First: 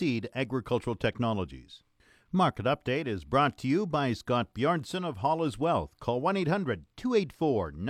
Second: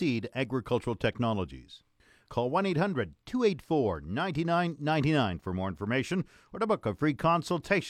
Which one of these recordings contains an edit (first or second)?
second